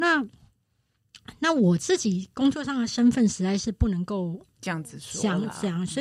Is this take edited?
no; 0 cuts

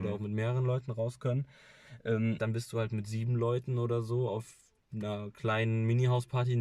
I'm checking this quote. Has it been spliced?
yes; 1 cut; at 2.4 s

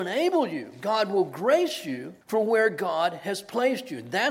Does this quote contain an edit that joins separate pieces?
yes; 1 cut; at 2.2 s

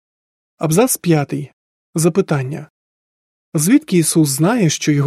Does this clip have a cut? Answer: no; 0 cuts

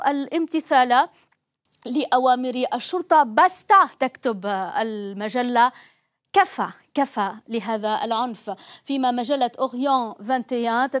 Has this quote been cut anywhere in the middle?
no; 0 cuts

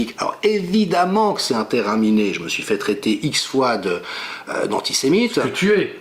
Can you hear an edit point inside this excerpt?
no; 0 cuts

